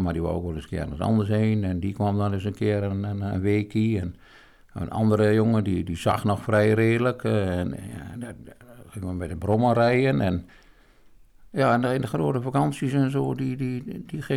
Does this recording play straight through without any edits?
yes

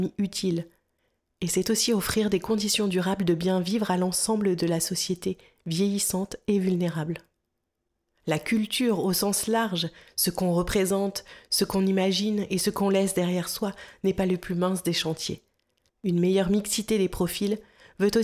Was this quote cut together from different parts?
yes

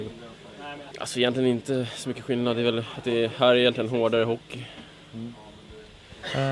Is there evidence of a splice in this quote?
yes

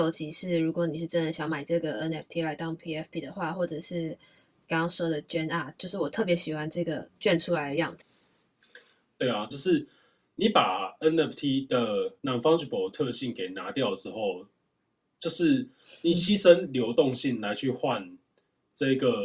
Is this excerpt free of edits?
no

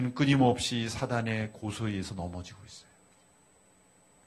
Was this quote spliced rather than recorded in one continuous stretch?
no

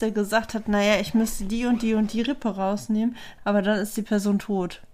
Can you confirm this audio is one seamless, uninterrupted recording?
no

